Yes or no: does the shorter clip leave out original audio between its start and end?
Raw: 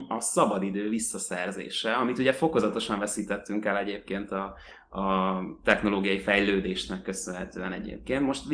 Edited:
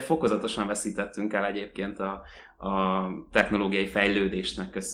no